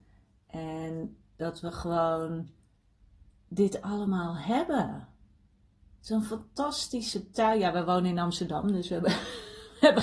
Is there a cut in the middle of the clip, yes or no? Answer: no